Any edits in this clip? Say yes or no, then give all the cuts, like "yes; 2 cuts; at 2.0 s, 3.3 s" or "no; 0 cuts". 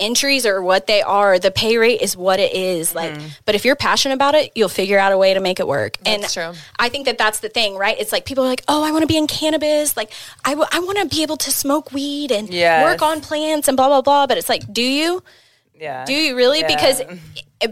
no; 0 cuts